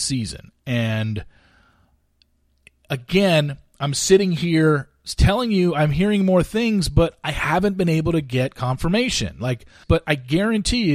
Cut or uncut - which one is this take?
cut